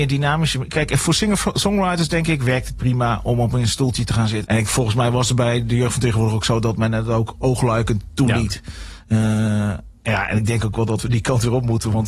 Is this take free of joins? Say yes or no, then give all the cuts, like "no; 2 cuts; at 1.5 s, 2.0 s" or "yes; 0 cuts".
no; 1 cut; at 4.4 s